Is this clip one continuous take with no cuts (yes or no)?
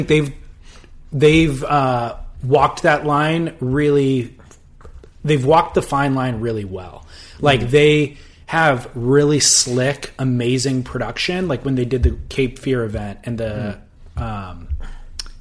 yes